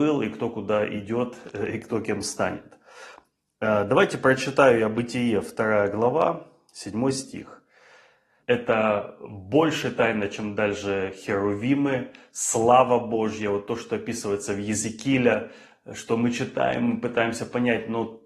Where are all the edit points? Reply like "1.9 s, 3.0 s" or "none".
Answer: 8.4 s